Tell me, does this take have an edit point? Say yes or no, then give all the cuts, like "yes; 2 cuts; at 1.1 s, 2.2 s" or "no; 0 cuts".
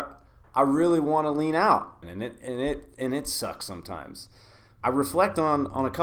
yes; 2 cuts; at 2.0 s, 4.8 s